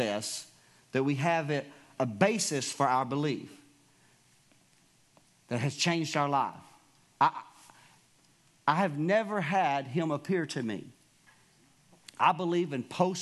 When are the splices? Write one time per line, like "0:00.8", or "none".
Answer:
0:02.0
0:07.1